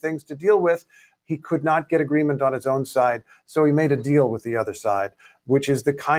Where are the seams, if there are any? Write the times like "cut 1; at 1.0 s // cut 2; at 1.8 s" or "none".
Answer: none